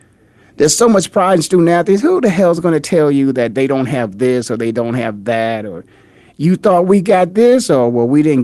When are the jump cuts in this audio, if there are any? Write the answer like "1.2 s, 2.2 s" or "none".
none

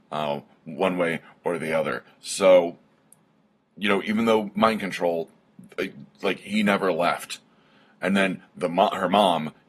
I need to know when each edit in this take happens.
none

